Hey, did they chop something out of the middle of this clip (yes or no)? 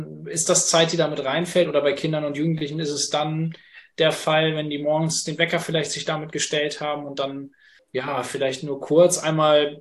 no